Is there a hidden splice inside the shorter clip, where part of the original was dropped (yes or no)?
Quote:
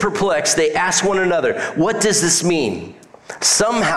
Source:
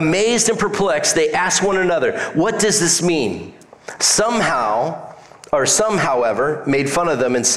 no